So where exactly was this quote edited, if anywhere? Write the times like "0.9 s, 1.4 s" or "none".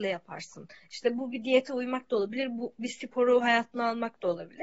none